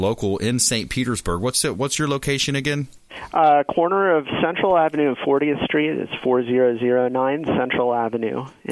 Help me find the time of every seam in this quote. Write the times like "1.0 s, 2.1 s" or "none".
none